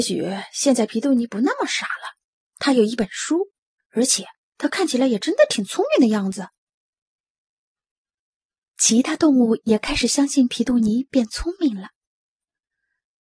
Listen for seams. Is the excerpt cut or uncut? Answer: uncut